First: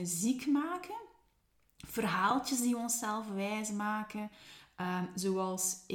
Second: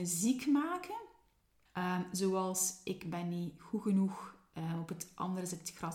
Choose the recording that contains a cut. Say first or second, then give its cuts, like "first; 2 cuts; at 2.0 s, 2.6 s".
second; 1 cut; at 1.7 s